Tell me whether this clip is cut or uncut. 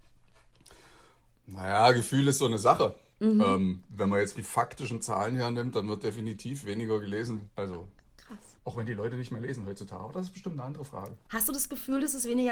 cut